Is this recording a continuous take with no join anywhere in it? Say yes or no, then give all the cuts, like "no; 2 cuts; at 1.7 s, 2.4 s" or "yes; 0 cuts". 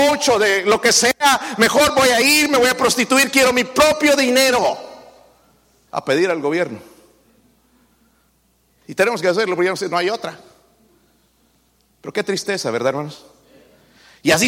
no; 1 cut; at 5.9 s